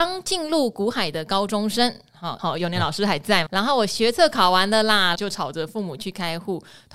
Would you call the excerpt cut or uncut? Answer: cut